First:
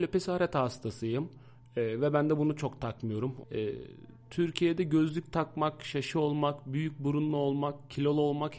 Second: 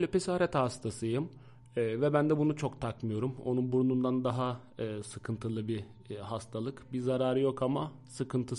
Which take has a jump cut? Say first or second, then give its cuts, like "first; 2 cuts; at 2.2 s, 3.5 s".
first; 1 cut; at 3.4 s